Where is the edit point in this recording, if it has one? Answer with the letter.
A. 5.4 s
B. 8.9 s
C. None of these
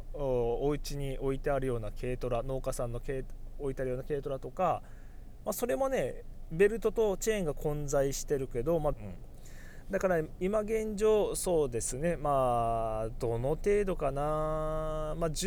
B